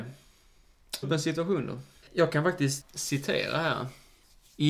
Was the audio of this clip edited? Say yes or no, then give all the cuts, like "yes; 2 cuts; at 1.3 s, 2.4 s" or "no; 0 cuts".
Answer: yes; 1 cut; at 1.0 s